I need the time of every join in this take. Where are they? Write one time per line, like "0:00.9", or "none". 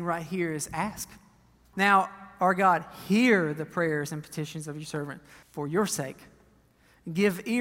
0:01.7
0:05.4